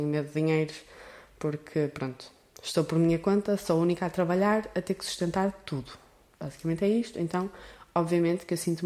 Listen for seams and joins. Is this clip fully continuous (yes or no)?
yes